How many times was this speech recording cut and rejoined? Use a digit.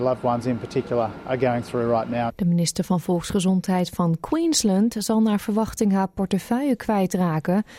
1